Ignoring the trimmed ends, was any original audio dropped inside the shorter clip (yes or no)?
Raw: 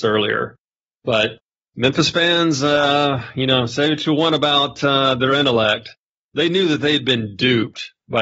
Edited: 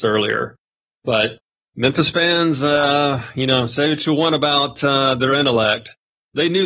no